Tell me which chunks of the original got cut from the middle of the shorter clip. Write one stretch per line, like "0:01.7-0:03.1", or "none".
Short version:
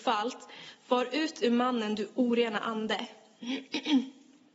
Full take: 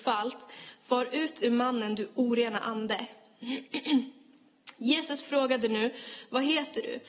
none